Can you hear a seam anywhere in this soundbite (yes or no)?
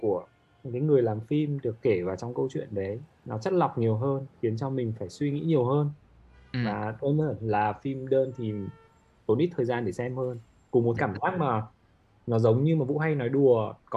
yes